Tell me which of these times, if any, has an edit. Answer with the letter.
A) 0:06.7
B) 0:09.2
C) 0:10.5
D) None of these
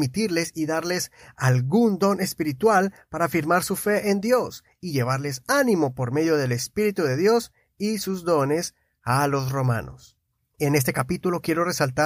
C